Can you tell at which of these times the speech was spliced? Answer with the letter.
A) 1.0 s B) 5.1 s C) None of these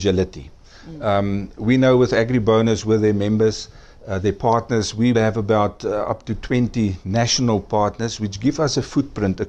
B